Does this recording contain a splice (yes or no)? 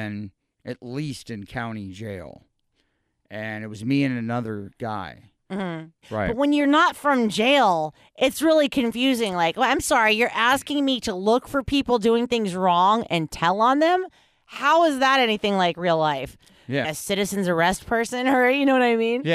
yes